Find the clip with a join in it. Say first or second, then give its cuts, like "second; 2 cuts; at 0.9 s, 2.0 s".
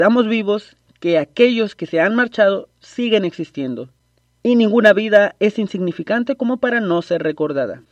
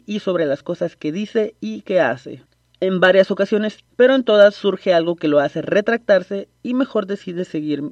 second; 1 cut; at 3.9 s